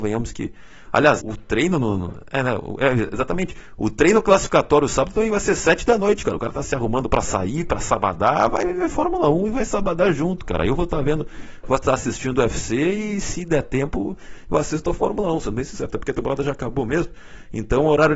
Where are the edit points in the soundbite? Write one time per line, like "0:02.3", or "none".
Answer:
0:01.2